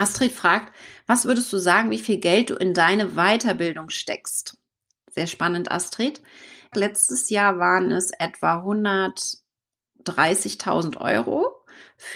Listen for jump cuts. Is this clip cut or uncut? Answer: cut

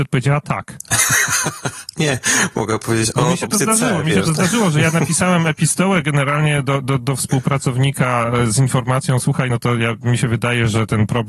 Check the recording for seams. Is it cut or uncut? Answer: uncut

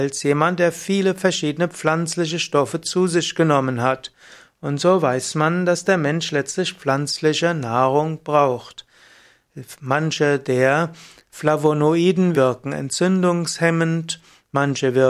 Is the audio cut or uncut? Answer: cut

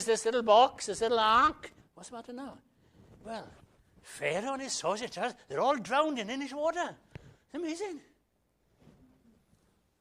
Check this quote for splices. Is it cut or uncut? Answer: cut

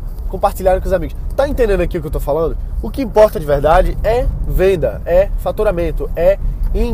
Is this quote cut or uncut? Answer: uncut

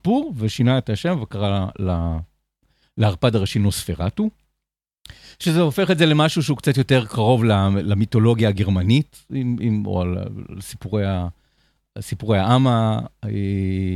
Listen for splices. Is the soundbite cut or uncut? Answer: uncut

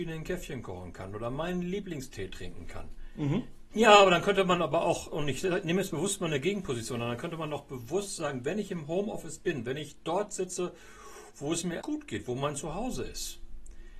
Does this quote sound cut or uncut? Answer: cut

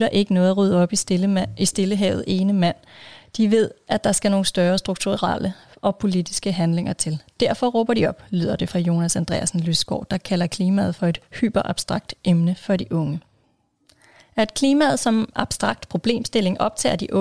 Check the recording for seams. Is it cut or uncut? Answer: uncut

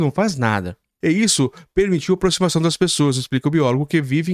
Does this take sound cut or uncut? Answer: cut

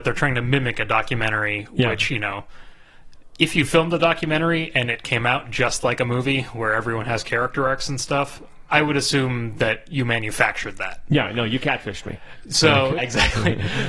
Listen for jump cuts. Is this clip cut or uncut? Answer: cut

